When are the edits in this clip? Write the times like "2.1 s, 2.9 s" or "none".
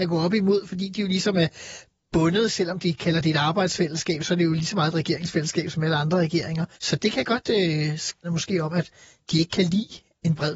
6.7 s, 8.2 s